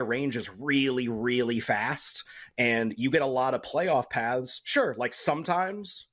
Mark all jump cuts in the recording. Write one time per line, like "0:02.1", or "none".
none